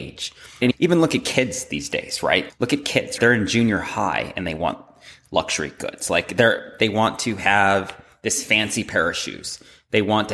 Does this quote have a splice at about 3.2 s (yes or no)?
no